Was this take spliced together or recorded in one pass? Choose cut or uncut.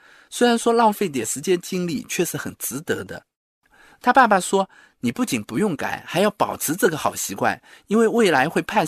uncut